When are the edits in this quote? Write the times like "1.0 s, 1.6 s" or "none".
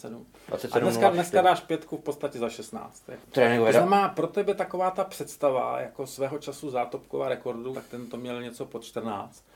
3.2 s, 7.7 s